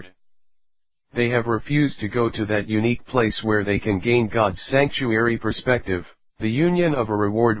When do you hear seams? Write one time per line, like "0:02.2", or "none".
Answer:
0:06.3